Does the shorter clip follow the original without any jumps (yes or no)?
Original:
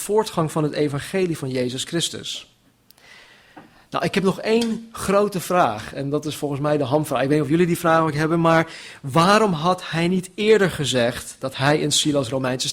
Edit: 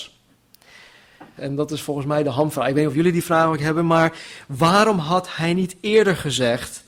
no